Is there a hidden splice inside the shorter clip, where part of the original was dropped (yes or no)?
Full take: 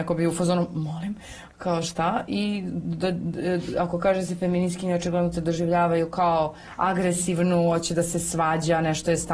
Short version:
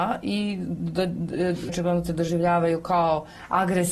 yes